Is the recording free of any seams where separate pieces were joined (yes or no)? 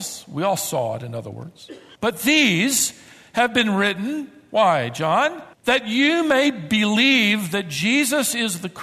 no